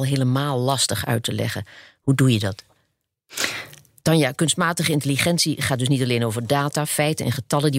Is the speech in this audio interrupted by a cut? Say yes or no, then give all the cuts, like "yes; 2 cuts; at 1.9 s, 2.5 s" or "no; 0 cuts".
yes; 1 cut; at 4.0 s